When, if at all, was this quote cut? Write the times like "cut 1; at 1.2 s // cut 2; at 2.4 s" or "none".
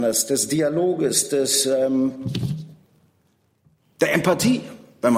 none

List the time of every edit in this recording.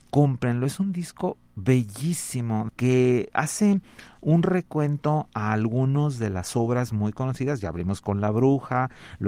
cut 1; at 2.7 s

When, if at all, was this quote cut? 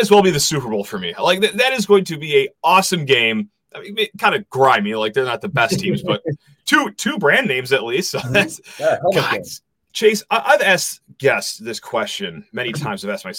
cut 1; at 9.9 s

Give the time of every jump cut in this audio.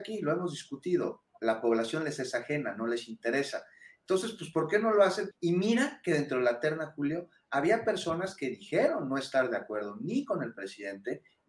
cut 1; at 5.3 s

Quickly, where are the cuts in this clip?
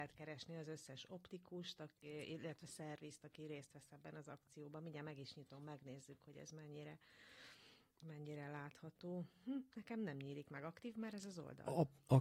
none

